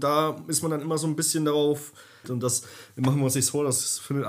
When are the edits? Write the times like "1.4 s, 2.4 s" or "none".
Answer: 2.2 s